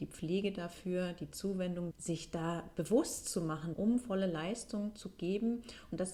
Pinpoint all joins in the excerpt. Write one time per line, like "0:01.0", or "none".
0:01.9
0:03.7